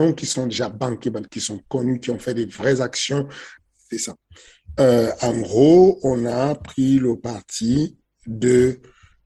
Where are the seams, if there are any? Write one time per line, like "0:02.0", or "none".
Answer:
0:03.6